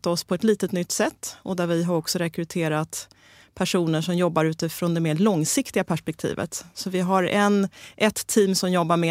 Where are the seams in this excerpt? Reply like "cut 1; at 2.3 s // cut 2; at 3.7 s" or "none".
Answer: none